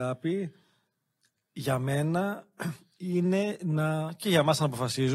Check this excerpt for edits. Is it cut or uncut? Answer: uncut